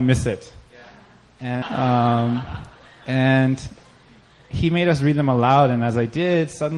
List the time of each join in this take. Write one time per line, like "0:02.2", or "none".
0:01.6